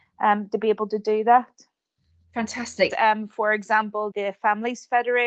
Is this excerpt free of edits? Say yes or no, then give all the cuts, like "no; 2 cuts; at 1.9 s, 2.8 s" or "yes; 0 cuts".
no; 2 cuts; at 2.9 s, 4.1 s